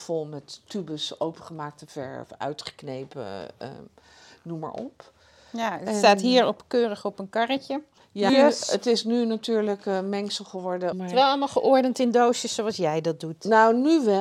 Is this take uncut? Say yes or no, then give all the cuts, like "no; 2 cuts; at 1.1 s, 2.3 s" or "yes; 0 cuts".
no; 2 cuts; at 8.3 s, 10.9 s